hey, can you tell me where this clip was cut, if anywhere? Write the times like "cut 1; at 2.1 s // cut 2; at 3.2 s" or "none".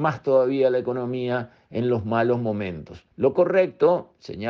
cut 1; at 3.1 s

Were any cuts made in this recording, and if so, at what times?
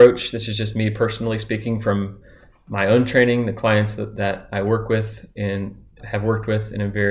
cut 1; at 6.0 s

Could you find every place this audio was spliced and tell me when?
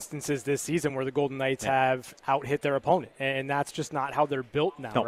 none

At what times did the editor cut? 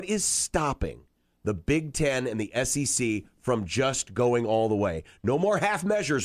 none

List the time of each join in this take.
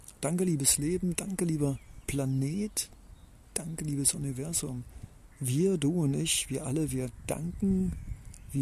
cut 1; at 5.3 s

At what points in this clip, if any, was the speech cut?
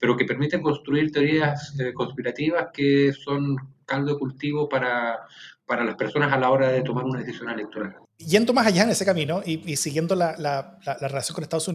cut 1; at 8.1 s

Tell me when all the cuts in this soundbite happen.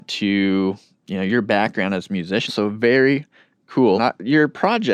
cut 1; at 2.5 s // cut 2; at 3.9 s

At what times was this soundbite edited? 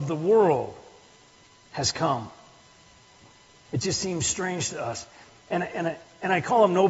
none

